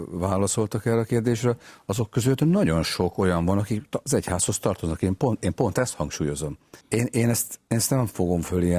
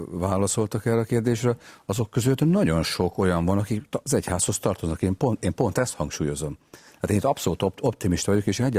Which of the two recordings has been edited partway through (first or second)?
first